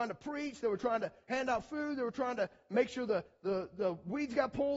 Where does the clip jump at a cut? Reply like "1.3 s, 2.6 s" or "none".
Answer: none